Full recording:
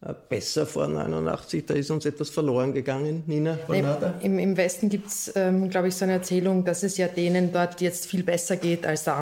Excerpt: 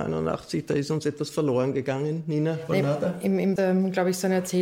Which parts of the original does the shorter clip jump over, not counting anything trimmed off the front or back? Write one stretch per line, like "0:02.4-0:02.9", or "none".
0:04.6-0:05.3